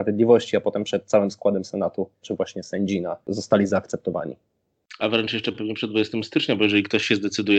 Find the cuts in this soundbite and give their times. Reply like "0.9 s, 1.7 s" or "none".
2.2 s